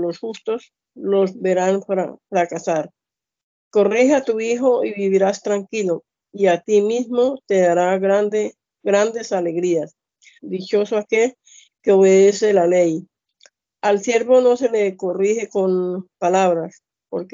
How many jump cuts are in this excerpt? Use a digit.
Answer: 1